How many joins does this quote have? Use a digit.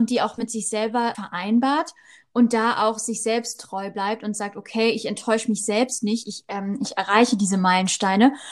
1